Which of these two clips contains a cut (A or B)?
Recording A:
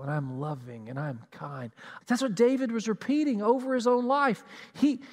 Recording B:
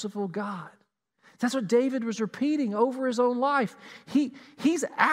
A